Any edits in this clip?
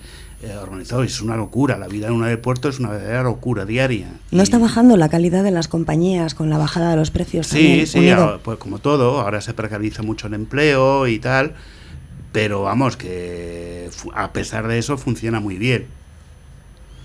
no; 0 cuts

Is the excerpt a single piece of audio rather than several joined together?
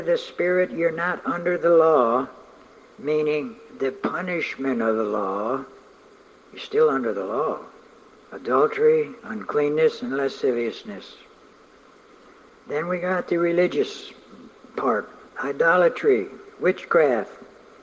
no; 2 cuts; at 8.1 s, 9.2 s

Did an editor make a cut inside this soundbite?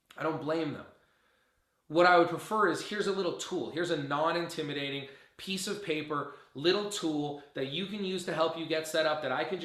no; 0 cuts

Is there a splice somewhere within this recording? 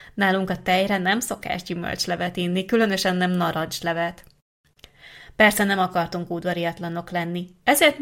no; 0 cuts

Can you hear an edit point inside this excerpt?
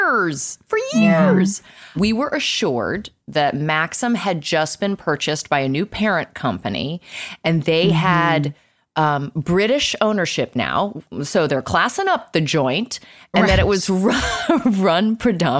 yes; 1 cut; at 2.0 s

